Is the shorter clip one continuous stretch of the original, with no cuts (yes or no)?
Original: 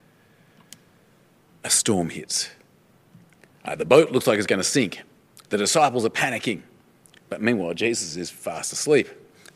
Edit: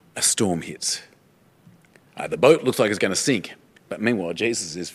no